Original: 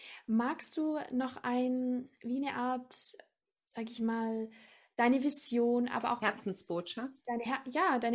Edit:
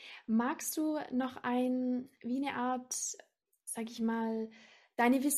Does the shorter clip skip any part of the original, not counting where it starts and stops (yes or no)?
no